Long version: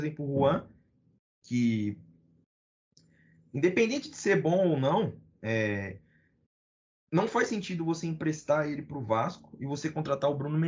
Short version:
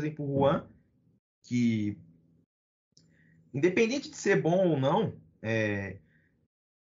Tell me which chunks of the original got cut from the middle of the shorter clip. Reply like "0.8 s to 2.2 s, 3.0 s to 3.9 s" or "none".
none